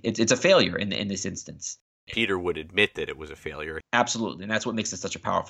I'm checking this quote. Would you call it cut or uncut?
cut